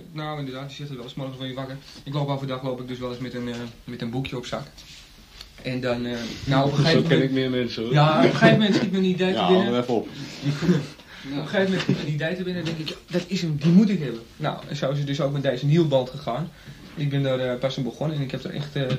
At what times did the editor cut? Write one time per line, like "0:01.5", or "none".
none